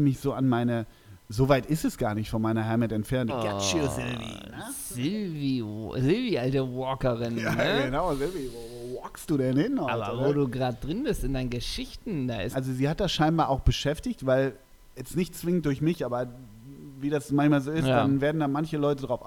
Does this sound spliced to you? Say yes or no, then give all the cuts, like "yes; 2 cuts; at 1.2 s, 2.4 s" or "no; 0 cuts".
yes; 2 cuts; at 3.3 s, 12.5 s